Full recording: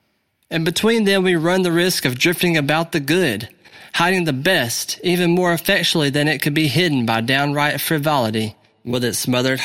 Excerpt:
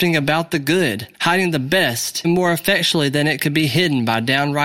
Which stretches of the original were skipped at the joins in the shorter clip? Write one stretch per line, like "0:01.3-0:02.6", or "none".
0:03.5-0:03.9
0:05.0-0:05.2

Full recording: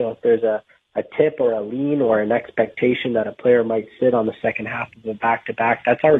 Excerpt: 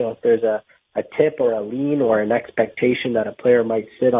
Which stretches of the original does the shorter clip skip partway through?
none

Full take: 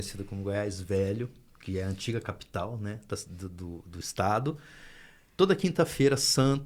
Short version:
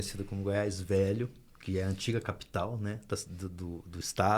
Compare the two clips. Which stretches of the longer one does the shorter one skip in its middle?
none

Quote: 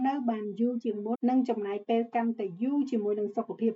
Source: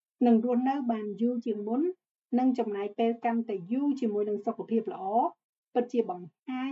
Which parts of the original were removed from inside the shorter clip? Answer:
0:01.8-0:02.2

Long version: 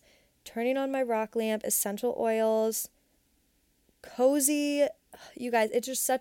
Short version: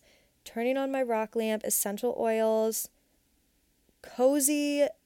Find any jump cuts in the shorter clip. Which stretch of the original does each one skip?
none

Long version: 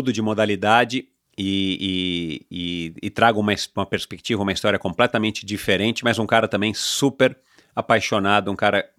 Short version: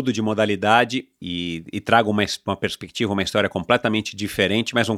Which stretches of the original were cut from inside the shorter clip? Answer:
0:01.2-0:02.5

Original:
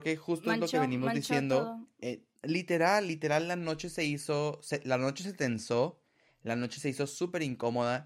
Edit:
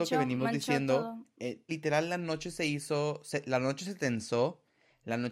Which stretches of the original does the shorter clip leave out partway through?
0:02.3-0:03.1

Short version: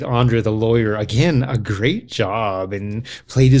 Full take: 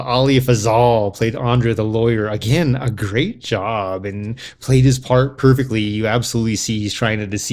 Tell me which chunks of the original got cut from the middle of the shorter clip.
none

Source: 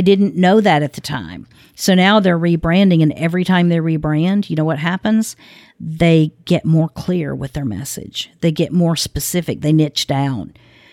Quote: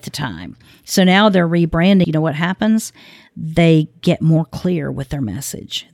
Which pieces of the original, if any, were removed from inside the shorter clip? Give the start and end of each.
0:02.9-0:04.5

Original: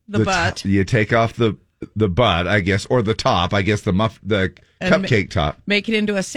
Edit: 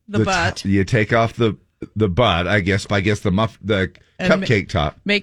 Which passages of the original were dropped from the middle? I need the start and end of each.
0:02.9-0:03.5

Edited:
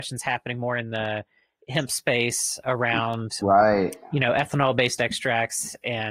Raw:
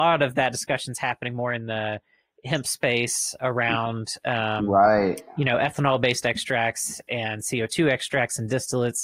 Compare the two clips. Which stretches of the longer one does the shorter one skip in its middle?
0:04.2-0:04.7

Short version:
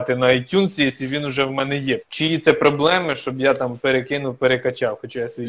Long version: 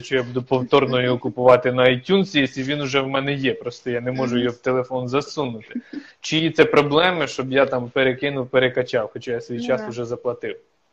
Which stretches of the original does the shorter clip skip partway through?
0:03.6-0:06.1

